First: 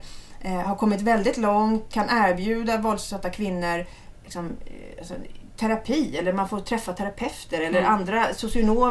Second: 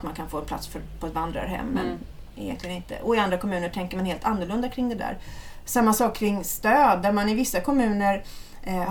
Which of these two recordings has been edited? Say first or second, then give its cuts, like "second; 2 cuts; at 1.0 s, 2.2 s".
first; 1 cut; at 1.9 s